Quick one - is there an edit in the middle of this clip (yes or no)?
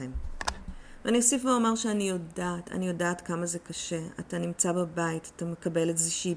no